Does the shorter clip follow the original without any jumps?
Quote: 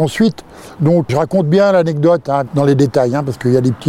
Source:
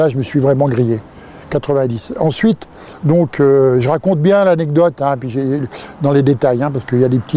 no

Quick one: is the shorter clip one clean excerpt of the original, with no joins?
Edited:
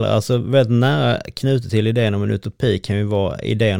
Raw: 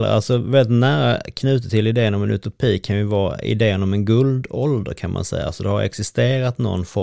yes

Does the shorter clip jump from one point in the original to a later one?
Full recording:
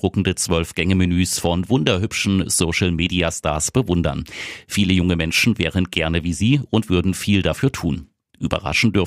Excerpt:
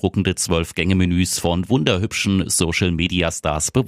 no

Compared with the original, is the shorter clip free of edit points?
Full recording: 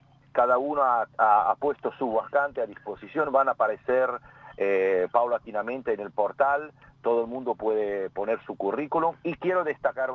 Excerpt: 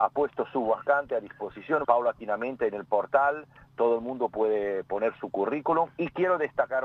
no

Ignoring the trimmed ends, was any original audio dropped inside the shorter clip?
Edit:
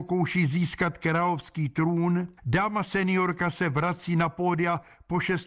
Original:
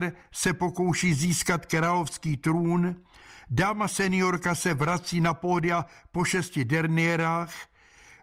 yes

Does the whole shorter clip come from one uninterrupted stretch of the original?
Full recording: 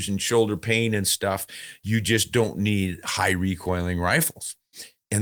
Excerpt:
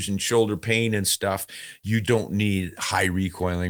no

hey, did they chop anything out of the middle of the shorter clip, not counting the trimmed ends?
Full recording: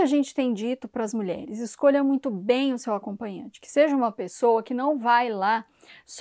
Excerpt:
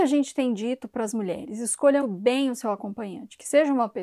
yes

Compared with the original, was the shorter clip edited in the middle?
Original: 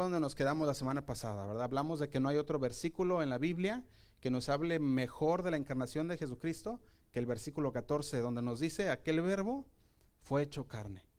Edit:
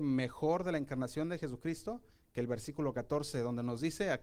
no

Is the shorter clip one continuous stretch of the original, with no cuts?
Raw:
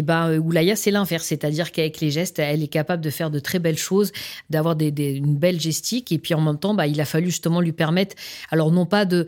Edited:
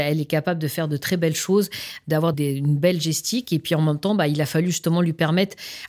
no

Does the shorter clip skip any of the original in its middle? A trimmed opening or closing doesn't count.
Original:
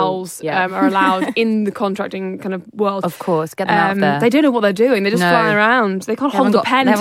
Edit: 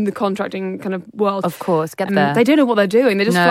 yes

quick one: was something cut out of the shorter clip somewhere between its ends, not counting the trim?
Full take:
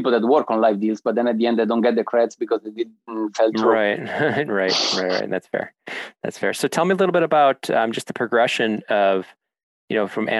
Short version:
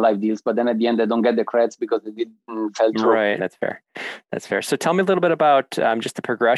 yes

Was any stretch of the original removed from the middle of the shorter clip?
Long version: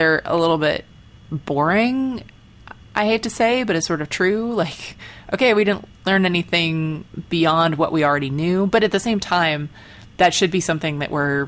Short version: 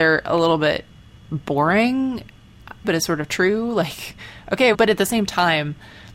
yes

